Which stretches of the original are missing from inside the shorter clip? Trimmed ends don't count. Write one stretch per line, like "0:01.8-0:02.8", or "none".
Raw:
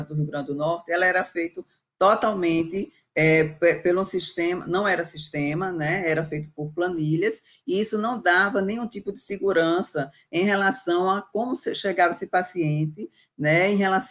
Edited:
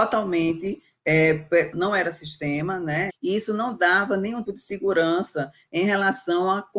0:03.8-0:04.6
0:06.0-0:07.5
0:08.9-0:09.0

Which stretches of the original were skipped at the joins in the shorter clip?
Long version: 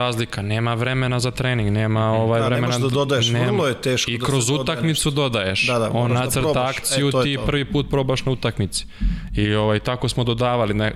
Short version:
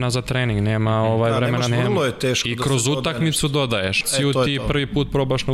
0:02.8-0:03.3
0:05.6-0:06.8

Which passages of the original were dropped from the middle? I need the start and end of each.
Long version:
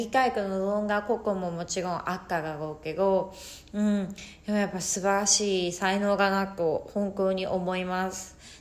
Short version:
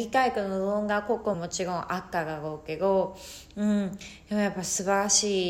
0:01.3-0:01.5

